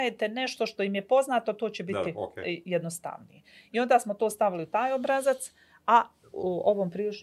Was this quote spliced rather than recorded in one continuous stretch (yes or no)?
yes